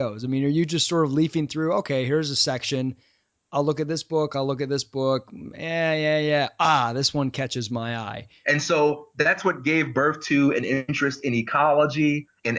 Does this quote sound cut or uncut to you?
cut